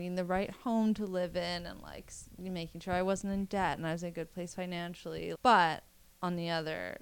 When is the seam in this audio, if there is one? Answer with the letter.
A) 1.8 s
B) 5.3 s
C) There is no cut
B